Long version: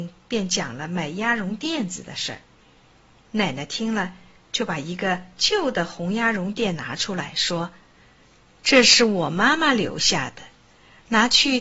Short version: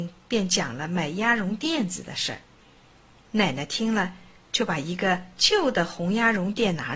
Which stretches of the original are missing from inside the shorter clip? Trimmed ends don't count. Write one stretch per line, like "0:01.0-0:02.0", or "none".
none